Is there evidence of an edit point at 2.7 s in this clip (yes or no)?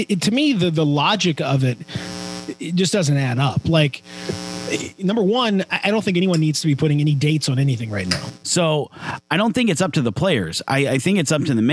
no